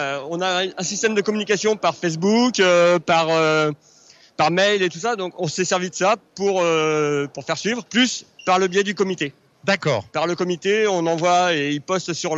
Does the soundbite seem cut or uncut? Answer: cut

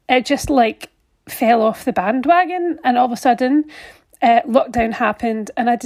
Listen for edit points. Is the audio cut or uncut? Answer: uncut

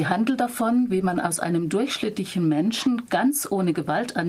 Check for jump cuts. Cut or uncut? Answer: uncut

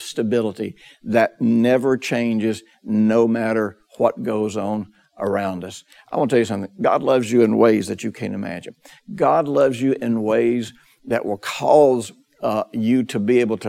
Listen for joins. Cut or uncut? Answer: uncut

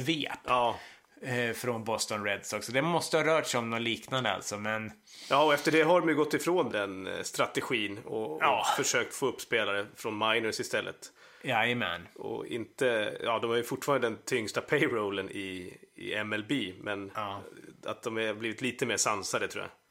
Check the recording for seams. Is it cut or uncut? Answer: cut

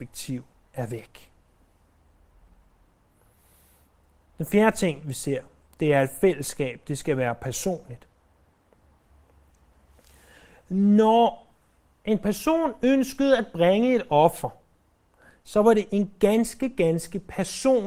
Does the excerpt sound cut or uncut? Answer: uncut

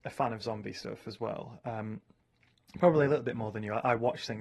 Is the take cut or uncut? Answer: uncut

